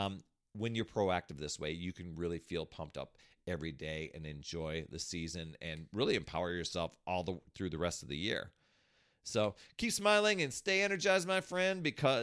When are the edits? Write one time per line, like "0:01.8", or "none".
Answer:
none